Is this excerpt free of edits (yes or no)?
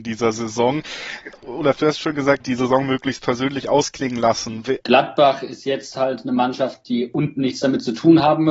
no